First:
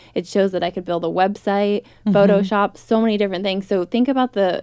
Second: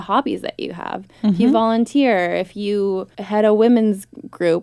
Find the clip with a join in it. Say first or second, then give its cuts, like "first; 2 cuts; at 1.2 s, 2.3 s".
second; 1 cut; at 3.1 s